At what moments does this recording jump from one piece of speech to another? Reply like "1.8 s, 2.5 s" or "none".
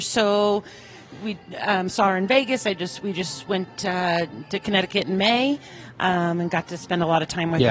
none